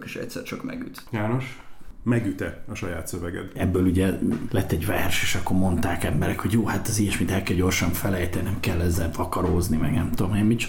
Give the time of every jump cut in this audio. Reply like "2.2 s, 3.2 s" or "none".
3.5 s